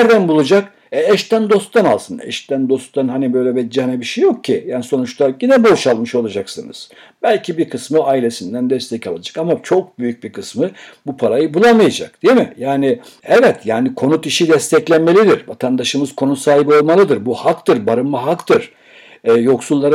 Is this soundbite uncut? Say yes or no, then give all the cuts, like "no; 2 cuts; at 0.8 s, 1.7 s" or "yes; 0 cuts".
yes; 0 cuts